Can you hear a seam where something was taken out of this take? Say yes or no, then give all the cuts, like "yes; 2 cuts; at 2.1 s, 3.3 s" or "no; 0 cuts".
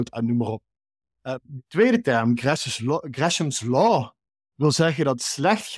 no; 0 cuts